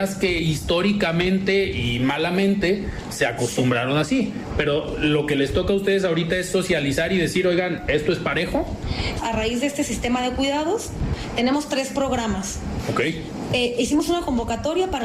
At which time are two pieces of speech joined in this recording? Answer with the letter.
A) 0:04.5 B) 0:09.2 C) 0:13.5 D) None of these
B